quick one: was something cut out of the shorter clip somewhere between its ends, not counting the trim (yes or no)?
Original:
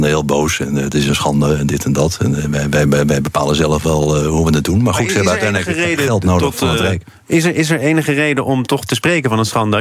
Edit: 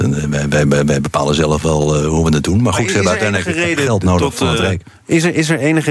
no